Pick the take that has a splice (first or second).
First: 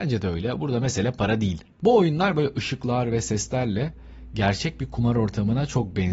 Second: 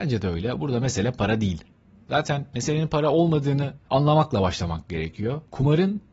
first